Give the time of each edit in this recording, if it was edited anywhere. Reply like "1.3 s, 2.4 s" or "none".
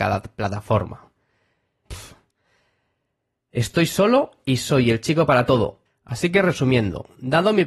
1.9 s, 5.9 s